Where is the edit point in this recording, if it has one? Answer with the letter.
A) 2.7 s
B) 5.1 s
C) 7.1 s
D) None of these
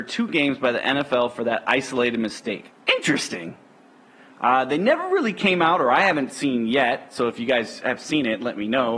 A